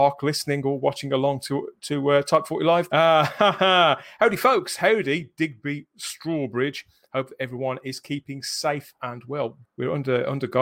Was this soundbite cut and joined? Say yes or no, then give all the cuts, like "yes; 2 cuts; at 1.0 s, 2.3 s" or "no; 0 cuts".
yes; 2 cuts; at 2.9 s, 9.6 s